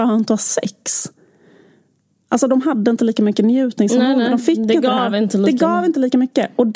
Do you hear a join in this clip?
no; 0 cuts

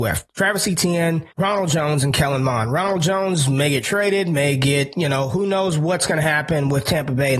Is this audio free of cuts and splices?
no; 1 cut; at 1.3 s

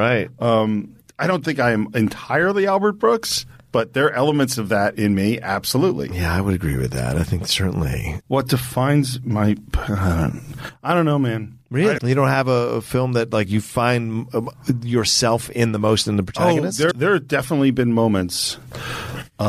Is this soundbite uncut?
no; 3 cuts; at 8.2 s, 12.0 s, 16.9 s

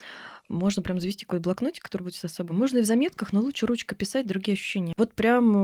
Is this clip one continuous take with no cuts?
yes; 0 cuts

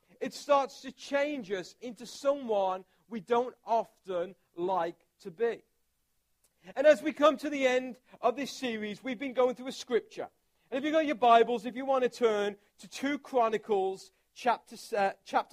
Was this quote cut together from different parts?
no; 0 cuts

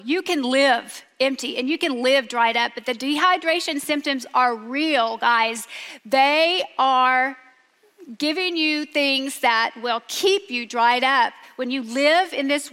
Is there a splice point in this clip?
no; 0 cuts

